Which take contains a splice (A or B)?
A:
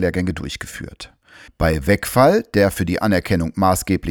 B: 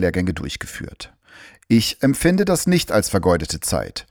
A